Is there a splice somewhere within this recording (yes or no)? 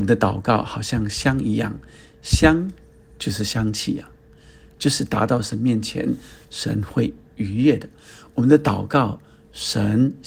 no